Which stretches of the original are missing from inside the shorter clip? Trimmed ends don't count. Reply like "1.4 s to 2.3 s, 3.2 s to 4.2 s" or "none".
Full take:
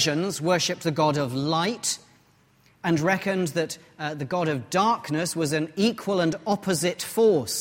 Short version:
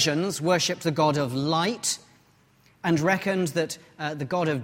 none